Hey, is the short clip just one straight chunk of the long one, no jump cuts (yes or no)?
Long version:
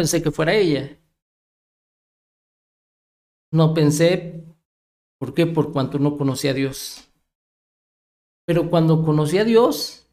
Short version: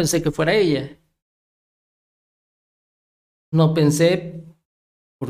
yes